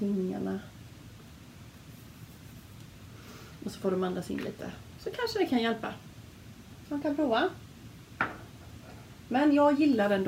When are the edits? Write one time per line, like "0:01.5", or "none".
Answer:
none